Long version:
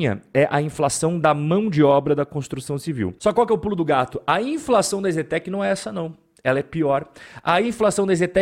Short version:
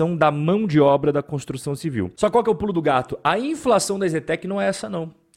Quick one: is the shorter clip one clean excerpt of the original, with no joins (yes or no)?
yes